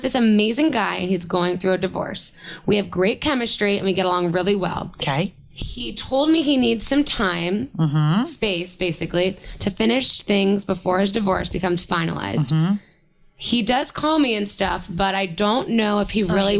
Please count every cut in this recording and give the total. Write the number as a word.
zero